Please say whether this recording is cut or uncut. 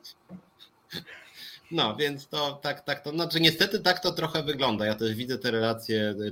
uncut